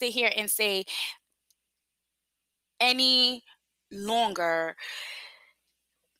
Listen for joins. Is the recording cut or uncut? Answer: uncut